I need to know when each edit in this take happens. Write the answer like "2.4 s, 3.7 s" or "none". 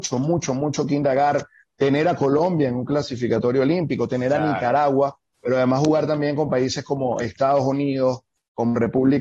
none